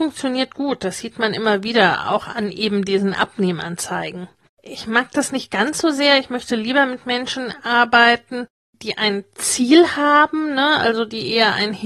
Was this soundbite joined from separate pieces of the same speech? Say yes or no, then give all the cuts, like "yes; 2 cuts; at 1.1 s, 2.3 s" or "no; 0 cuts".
no; 0 cuts